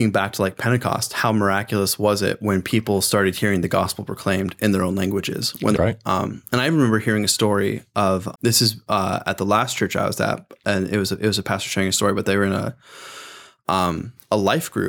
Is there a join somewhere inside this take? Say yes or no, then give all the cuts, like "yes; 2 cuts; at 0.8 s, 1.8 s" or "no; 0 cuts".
yes; 2 cuts; at 5.7 s, 8.3 s